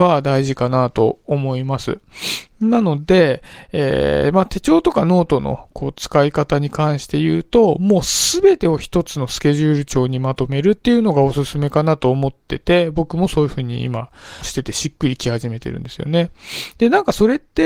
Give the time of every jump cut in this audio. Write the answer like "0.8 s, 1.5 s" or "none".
none